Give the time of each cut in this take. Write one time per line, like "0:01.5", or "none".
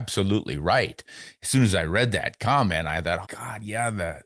0:03.2

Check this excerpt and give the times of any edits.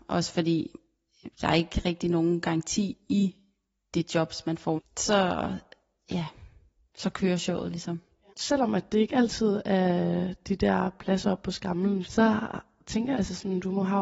0:04.8
0:12.0
0:13.1

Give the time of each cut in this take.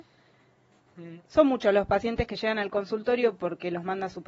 0:01.2

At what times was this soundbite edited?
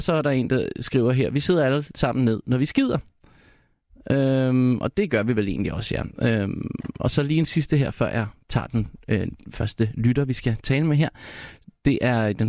none

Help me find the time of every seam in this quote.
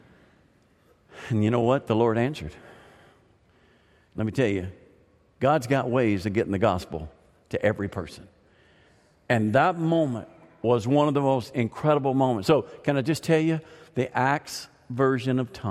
0:04.1

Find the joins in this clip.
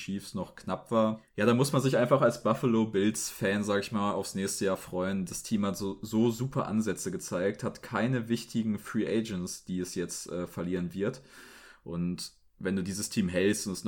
none

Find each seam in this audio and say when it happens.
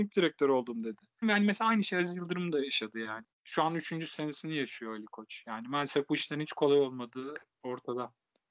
0:01.2
0:03.2

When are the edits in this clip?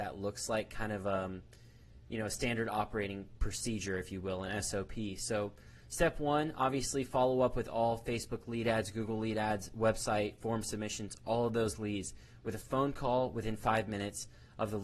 none

